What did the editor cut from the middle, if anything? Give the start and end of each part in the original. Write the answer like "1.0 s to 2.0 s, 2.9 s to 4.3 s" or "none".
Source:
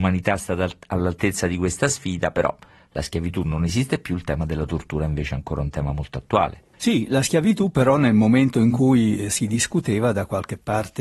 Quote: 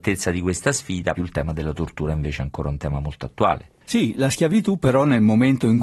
2.3 s to 4.1 s